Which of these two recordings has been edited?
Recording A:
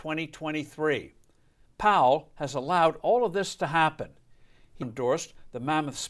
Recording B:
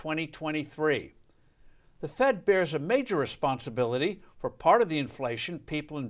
A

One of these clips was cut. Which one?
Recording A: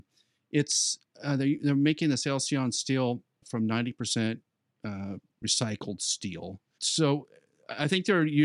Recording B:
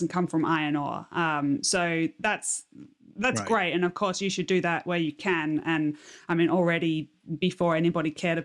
A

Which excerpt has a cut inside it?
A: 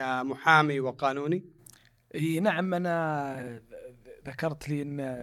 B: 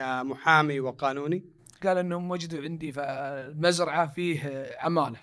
B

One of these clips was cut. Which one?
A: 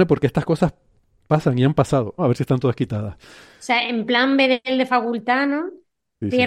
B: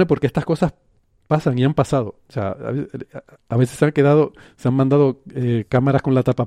A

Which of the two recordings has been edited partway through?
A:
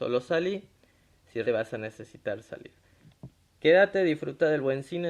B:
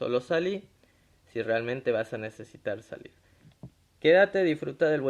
A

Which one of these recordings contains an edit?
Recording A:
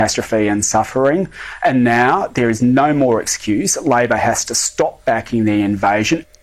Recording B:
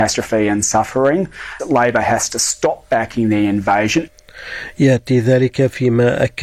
B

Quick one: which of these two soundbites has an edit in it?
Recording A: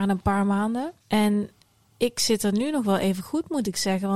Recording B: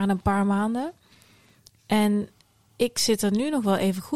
A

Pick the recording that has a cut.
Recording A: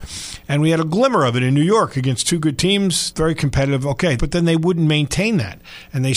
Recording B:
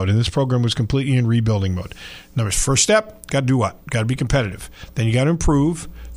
A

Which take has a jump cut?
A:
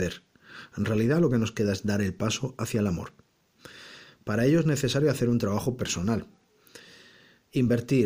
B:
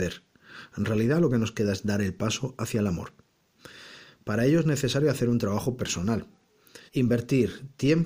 B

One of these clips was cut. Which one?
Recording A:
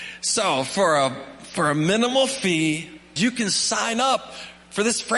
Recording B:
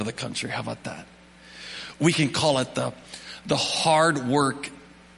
A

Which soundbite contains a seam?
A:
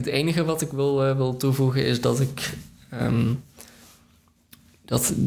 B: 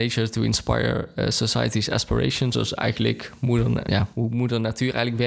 B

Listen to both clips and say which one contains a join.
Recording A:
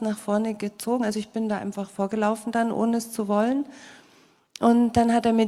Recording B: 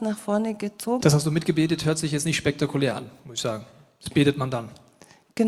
B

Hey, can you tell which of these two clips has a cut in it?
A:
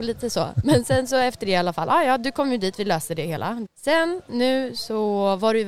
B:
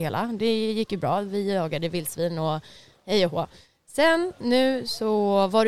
A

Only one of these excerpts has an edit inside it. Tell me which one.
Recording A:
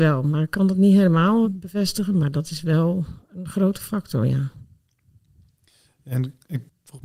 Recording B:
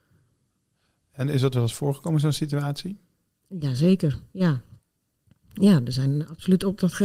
A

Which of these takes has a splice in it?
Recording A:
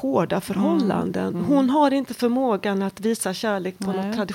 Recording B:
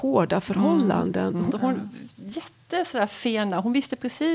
B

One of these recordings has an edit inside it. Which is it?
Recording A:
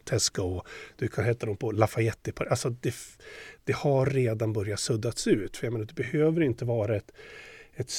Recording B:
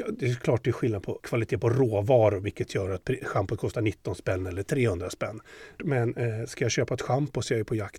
B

